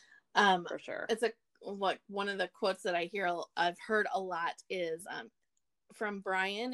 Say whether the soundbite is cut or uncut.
uncut